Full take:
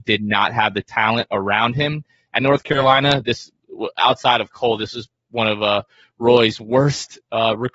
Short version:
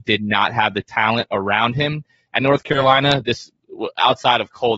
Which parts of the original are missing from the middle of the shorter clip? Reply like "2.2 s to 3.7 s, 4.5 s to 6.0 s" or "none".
none